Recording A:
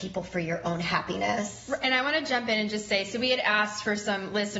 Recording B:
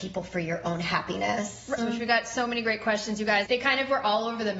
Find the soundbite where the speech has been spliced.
B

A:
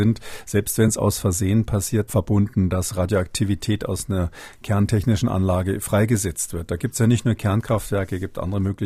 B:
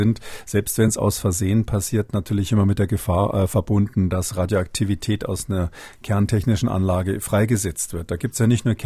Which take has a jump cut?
A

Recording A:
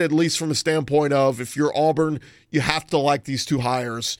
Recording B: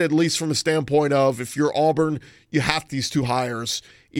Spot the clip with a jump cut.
B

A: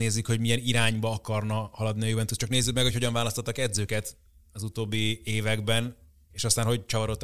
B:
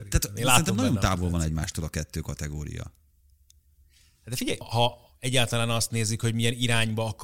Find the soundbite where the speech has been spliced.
B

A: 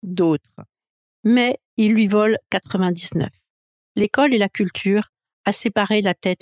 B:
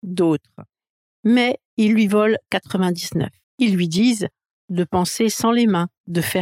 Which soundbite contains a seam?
B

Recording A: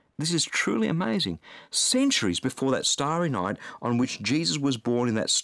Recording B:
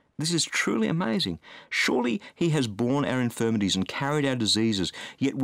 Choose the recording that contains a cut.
B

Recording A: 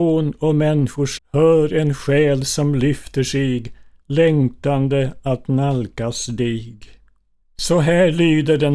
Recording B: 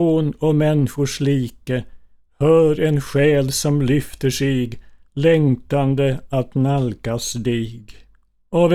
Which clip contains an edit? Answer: A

